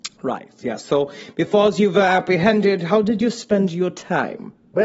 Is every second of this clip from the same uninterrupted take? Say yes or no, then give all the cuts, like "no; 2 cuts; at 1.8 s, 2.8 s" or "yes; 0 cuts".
yes; 0 cuts